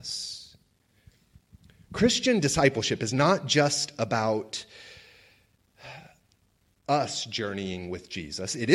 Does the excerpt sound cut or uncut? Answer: uncut